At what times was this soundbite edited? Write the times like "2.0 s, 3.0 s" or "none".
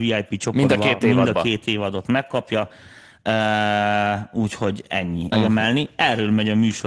5.3 s

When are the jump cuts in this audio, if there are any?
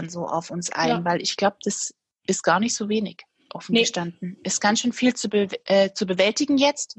none

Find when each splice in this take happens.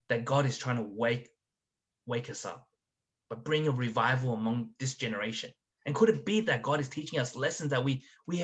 5.7 s

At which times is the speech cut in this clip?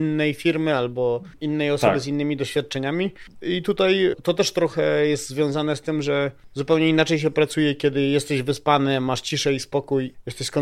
none

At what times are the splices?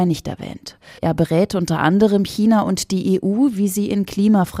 1.0 s

